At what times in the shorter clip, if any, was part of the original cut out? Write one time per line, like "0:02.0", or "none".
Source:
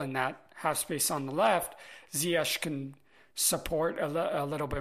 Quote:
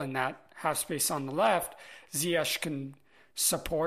none